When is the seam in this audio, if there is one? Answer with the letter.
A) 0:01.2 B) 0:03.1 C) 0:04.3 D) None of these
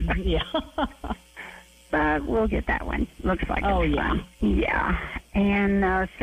C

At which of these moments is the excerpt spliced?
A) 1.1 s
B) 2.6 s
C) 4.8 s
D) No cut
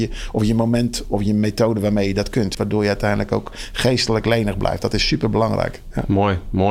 B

